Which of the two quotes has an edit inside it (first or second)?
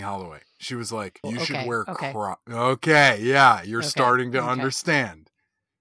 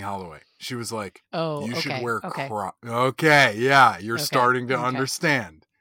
first